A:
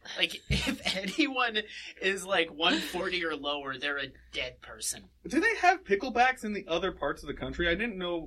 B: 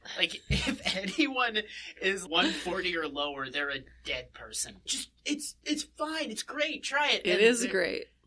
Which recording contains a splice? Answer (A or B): B